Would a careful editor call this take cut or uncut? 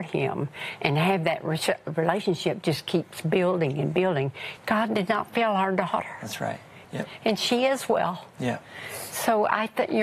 cut